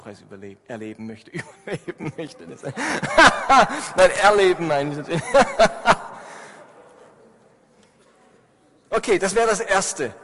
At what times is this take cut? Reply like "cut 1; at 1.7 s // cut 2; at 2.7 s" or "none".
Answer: none

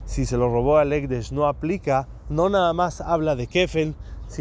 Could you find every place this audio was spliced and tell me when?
none

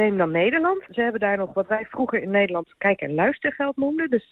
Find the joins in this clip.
none

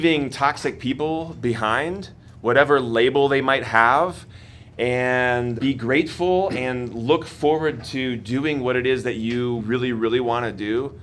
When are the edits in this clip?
cut 1; at 5.6 s // cut 2; at 9.6 s

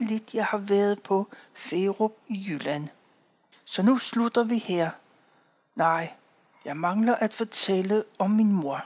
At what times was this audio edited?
cut 1; at 3.5 s

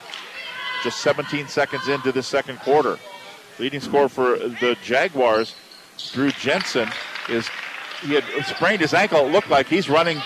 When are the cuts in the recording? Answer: none

